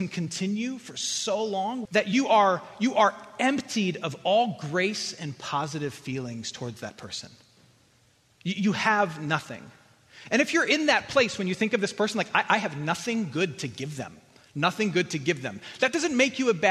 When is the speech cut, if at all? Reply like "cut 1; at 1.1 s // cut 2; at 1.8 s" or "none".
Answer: cut 1; at 1.9 s